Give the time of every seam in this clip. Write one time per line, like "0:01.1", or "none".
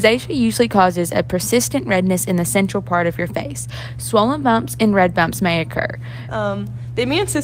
0:06.3